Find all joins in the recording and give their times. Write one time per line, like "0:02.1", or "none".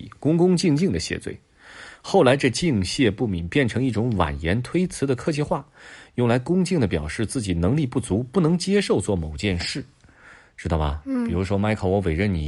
none